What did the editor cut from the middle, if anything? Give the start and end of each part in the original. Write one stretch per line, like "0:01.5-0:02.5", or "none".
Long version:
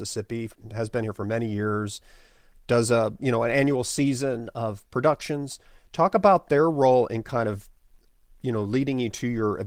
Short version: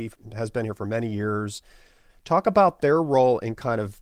0:02.5-0:05.8